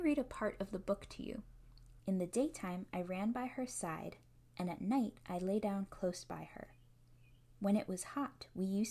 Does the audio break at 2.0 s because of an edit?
yes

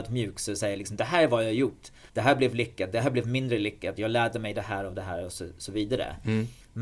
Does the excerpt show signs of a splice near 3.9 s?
no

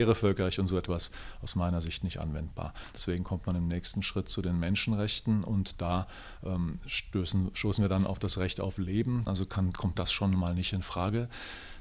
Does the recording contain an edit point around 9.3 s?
yes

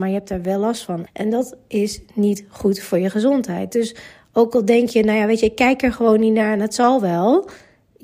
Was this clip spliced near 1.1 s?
yes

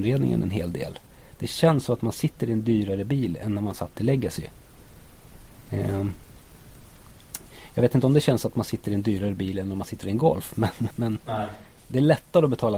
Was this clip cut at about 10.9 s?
yes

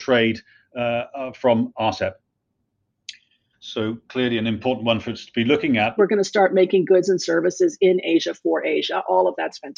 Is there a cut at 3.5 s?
yes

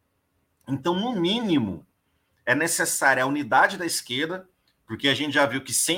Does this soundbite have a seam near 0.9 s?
no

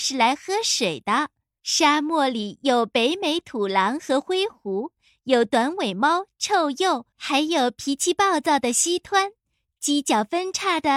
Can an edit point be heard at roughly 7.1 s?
yes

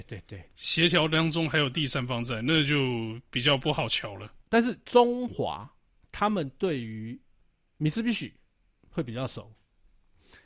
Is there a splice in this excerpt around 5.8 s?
no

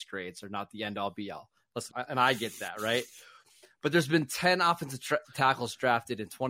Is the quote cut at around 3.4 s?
no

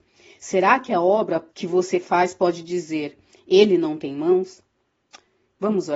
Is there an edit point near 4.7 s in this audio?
no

